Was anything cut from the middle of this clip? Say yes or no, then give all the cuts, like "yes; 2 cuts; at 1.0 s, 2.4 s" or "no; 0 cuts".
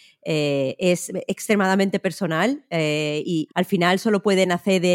yes; 1 cut; at 3.5 s